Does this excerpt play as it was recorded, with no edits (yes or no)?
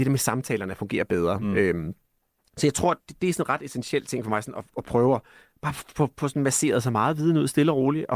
no